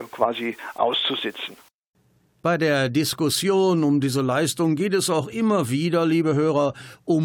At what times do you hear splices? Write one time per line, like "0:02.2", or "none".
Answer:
none